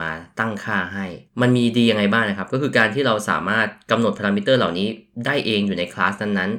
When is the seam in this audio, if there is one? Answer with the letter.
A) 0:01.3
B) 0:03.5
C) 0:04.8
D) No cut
A